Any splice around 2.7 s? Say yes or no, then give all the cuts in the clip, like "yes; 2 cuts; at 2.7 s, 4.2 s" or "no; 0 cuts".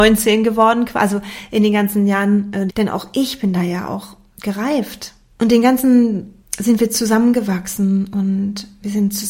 yes; 3 cuts; at 2.7 s, 5.3 s, 6.4 s